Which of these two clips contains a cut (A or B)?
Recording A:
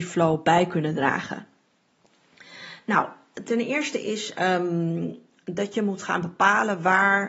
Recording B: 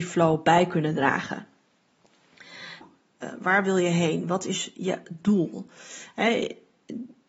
B